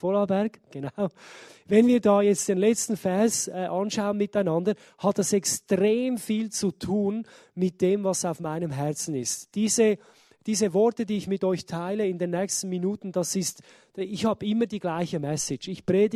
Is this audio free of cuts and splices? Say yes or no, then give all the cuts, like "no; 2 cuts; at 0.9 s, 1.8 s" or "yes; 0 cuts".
yes; 0 cuts